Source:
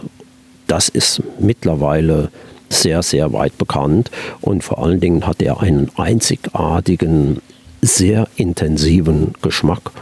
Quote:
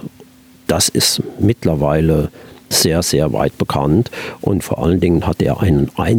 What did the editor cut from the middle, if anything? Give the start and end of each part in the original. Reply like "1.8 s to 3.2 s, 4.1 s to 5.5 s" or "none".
none